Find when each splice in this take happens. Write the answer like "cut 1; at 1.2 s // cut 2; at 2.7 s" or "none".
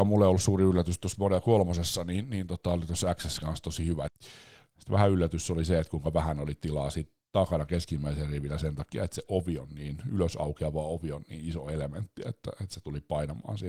cut 1; at 4.1 s